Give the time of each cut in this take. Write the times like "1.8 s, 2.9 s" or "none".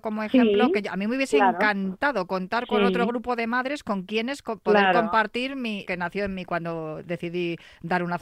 5.8 s